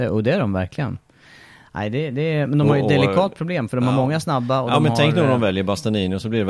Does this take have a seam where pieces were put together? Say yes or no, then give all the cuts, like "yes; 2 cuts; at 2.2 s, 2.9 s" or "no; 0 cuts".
no; 0 cuts